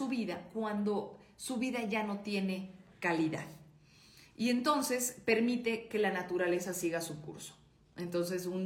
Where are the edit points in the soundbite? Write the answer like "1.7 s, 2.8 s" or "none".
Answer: 4.3 s